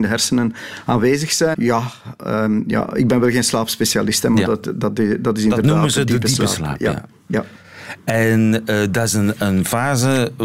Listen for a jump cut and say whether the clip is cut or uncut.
cut